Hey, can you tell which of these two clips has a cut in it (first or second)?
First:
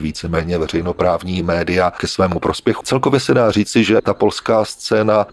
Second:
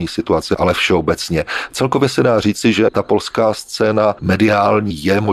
first